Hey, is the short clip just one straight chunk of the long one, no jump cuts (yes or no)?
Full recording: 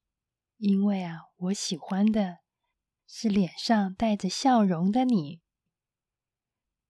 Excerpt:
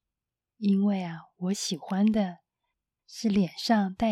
yes